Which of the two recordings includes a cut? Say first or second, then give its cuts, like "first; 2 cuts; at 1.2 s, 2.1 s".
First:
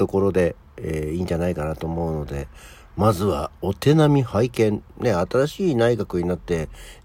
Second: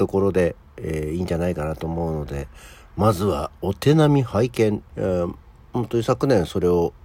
second; 1 cut; at 4.9 s